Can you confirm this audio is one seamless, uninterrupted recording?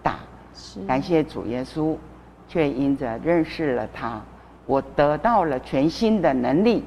yes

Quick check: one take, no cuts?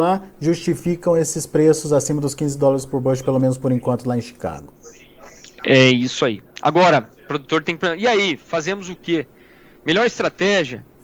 yes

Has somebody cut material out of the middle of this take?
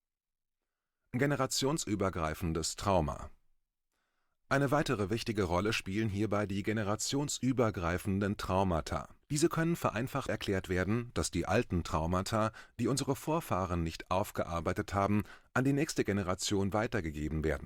yes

